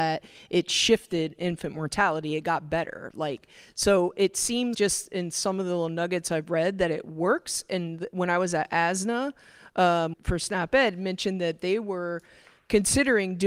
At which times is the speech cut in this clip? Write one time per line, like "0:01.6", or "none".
0:04.7
0:10.1